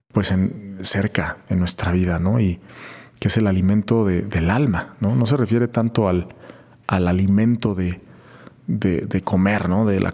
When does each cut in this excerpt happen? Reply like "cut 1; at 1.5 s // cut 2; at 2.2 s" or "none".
none